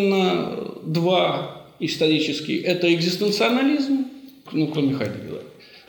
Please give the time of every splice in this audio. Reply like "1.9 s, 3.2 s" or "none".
4.5 s